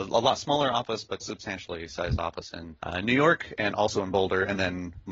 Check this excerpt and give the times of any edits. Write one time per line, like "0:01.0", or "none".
0:01.2
0:02.8